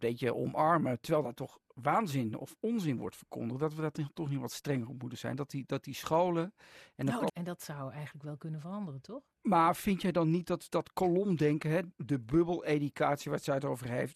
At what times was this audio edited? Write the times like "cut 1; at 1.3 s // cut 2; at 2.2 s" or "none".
cut 1; at 7.3 s